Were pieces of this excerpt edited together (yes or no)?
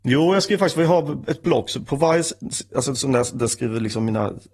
no